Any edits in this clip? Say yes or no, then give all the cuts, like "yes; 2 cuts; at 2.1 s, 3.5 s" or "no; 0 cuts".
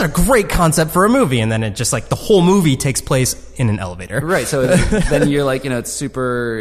no; 0 cuts